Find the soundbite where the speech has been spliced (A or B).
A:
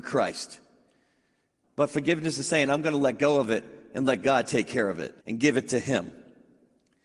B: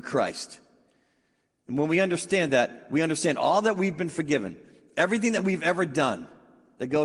A